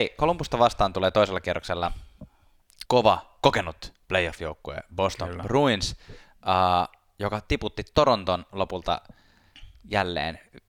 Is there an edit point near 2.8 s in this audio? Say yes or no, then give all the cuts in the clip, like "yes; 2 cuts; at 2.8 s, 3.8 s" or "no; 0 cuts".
yes; 1 cut; at 2.8 s